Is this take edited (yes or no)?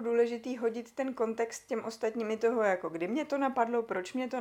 no